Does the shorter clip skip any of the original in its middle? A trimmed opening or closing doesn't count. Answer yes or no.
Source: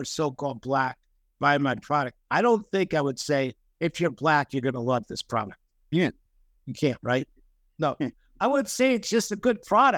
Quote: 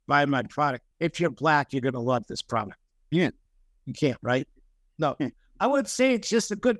yes